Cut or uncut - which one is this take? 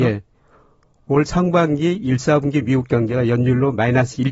uncut